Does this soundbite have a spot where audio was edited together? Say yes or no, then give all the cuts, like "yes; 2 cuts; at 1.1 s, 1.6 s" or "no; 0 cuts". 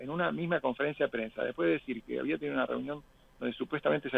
no; 0 cuts